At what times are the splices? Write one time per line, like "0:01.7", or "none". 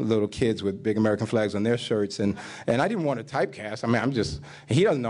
none